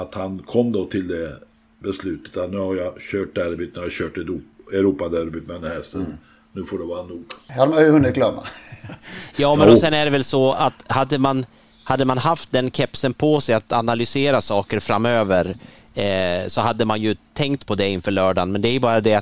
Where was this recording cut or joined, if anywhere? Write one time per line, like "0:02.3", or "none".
none